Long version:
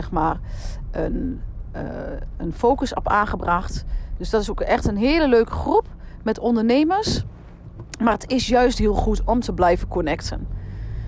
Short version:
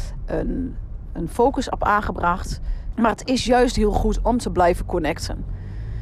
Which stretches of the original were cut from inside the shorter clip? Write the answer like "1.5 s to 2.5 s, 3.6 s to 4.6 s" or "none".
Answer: 1.7 s to 2.3 s, 4.2 s to 8.0 s